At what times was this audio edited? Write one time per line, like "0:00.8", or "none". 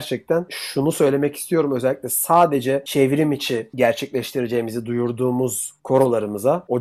none